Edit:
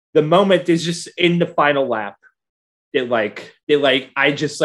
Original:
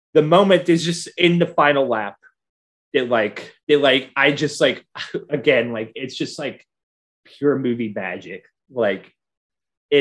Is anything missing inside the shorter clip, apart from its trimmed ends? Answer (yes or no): no